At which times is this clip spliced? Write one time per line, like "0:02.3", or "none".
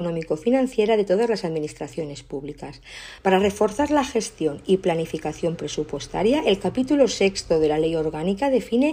0:03.2